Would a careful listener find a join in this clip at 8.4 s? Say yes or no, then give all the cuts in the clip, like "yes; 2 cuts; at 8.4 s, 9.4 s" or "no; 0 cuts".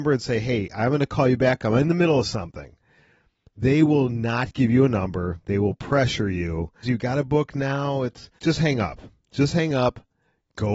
yes; 2 cuts; at 6.8 s, 8.4 s